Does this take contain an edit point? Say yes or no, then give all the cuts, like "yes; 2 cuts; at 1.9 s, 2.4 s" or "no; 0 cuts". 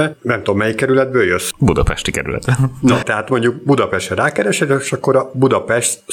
no; 0 cuts